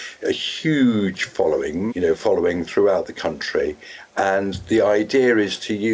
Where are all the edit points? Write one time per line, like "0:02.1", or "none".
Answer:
0:01.9